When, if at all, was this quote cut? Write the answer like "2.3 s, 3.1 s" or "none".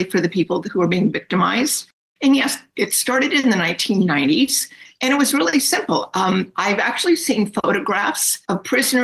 none